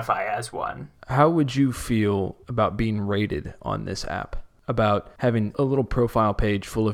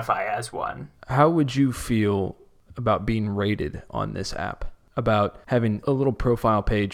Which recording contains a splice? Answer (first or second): first